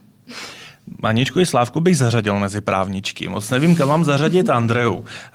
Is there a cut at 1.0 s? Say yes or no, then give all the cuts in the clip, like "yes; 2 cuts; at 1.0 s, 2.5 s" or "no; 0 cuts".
no; 0 cuts